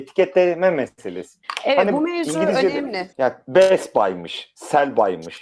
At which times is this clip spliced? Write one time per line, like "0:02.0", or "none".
0:03.1